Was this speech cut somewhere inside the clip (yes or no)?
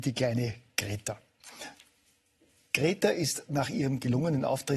no